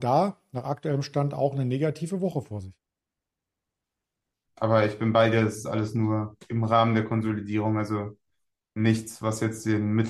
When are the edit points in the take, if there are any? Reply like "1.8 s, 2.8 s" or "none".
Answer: 4.5 s